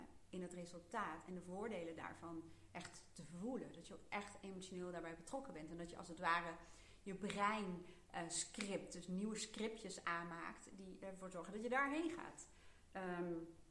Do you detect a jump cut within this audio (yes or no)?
no